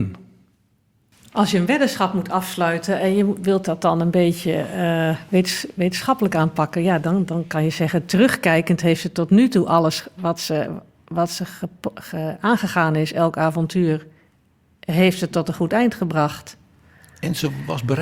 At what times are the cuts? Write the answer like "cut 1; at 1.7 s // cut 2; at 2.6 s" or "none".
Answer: none